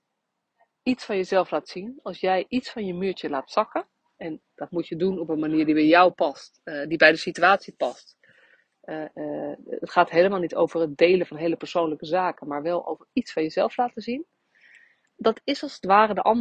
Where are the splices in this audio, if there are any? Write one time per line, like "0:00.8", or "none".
0:09.1
0:15.1